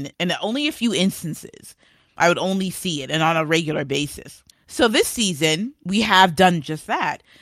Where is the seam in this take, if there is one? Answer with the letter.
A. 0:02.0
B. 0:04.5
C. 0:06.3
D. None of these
B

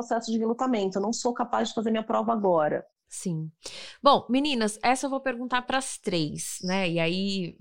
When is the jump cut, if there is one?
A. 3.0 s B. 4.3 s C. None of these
A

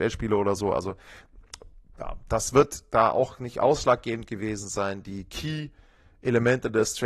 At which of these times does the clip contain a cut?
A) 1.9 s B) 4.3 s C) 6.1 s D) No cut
D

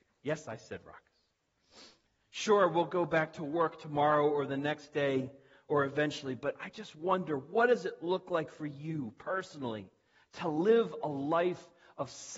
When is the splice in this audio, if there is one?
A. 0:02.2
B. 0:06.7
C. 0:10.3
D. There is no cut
A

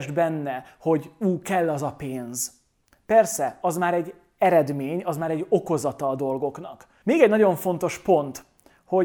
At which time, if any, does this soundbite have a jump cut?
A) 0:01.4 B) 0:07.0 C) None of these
B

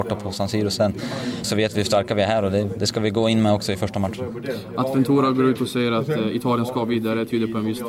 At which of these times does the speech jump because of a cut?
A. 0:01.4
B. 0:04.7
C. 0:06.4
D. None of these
A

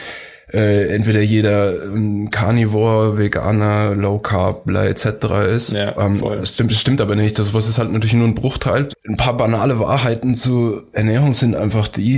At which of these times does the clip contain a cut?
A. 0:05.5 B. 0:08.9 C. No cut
B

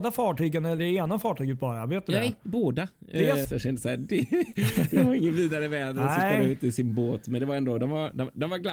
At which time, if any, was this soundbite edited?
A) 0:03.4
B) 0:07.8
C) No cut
A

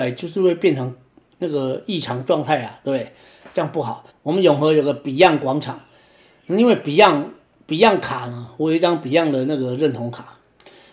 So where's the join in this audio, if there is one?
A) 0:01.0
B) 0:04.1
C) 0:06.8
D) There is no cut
B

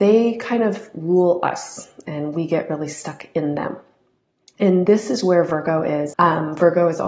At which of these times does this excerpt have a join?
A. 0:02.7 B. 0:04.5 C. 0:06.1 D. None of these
C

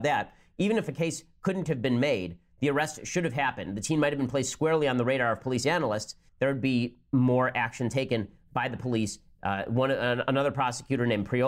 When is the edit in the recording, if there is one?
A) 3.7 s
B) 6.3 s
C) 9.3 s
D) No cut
B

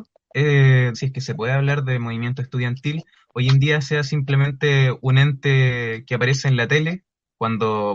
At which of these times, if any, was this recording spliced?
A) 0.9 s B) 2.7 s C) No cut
A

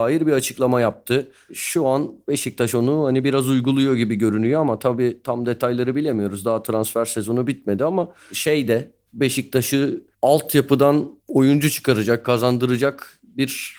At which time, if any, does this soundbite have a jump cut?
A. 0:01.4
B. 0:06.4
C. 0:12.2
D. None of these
C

